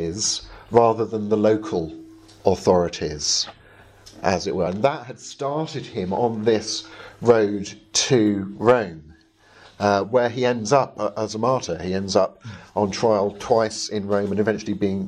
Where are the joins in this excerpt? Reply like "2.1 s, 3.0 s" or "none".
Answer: none